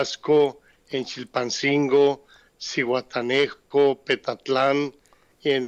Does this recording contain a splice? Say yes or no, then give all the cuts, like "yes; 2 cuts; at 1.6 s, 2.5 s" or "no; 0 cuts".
no; 0 cuts